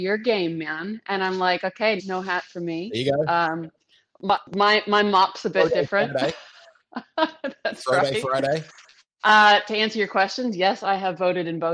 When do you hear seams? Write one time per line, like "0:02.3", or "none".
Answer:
0:02.0